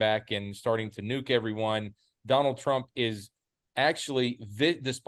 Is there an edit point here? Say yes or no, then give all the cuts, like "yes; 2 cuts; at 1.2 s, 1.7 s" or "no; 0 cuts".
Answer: no; 0 cuts